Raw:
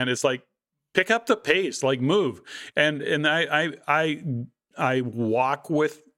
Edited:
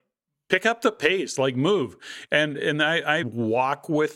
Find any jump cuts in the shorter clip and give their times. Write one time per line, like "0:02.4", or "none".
0:03.2